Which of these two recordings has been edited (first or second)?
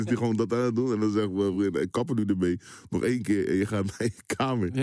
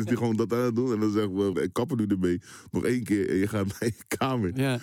second